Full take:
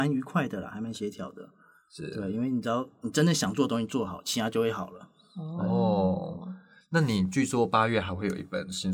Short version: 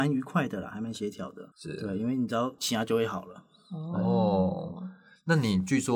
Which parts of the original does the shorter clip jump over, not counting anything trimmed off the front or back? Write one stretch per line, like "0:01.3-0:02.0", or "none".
0:01.5-0:01.9
0:02.9-0:04.2